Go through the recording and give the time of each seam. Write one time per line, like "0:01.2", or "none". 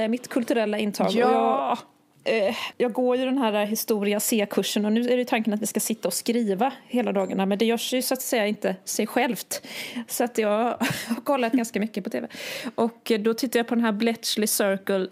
0:02.7